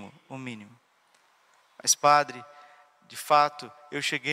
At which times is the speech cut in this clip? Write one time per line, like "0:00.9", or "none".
none